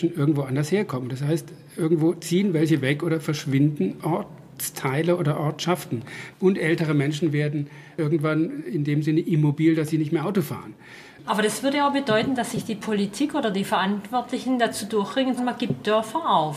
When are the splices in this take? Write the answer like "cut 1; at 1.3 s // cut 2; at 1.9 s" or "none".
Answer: cut 1; at 6.3 s // cut 2; at 11.2 s // cut 3; at 15.4 s